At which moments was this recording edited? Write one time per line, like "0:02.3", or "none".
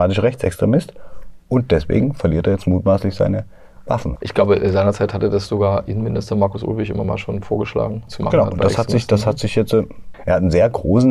0:04.2
0:08.1
0:10.1